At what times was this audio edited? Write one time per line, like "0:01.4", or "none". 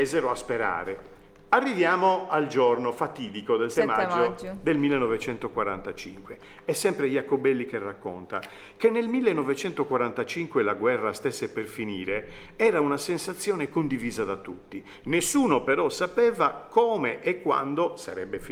0:03.7